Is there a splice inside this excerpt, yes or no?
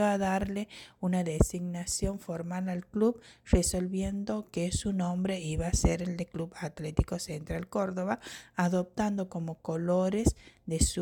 no